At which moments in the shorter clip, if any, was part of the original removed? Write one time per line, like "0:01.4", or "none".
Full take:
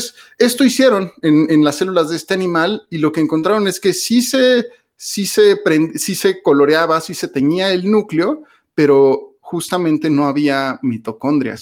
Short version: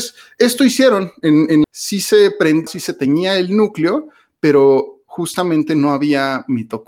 0:01.6
0:02.7